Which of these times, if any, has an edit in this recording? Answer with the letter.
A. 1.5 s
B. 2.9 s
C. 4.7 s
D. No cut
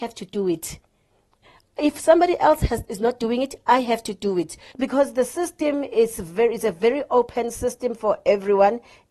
C